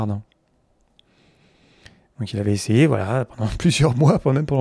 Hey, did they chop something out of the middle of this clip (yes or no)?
no